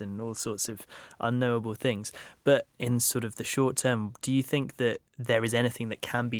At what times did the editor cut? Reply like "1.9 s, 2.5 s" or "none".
5.1 s